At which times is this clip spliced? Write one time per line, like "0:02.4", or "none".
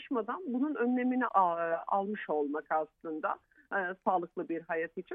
0:01.3